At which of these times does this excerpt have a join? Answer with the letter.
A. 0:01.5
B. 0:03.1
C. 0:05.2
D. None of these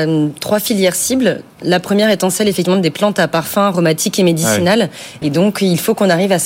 C